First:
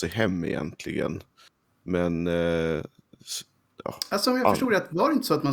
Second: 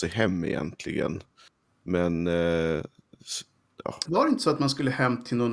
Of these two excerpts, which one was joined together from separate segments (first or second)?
second